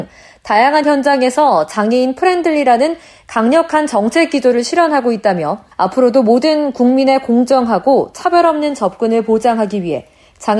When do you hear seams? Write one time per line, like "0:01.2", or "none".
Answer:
0:05.7